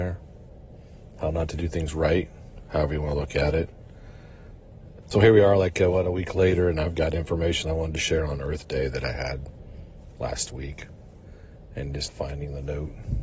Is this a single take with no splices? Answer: no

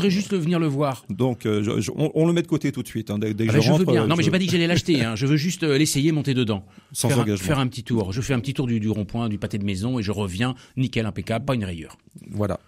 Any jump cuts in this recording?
no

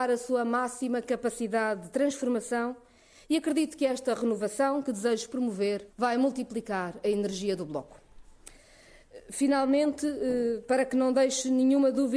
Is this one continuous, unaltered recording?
no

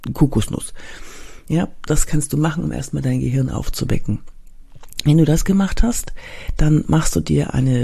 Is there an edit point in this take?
no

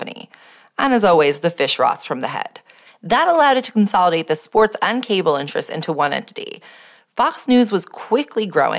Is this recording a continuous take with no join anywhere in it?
no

